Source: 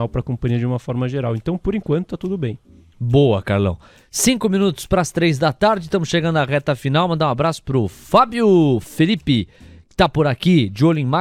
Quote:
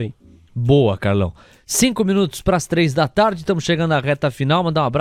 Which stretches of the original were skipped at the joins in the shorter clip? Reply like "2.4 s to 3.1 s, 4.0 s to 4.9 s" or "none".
none